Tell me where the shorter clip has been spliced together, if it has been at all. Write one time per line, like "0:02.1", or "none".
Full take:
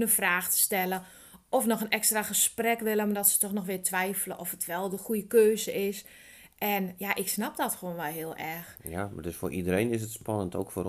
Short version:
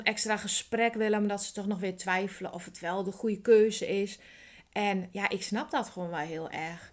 none